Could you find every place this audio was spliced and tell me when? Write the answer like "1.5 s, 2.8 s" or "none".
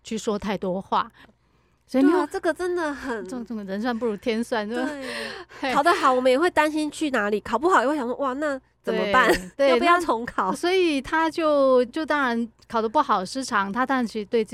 1.2 s, 11.9 s